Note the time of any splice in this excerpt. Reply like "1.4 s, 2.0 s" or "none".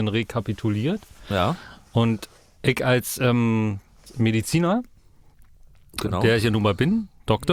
none